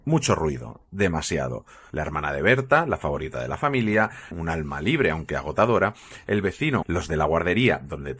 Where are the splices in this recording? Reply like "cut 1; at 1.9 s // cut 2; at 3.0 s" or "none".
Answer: cut 1; at 1.9 s // cut 2; at 4.3 s // cut 3; at 6.8 s